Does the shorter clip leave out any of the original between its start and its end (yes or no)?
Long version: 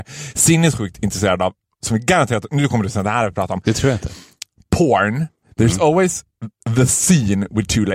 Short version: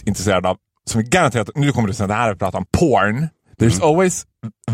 yes